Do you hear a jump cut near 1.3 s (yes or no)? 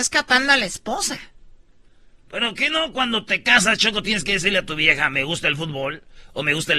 no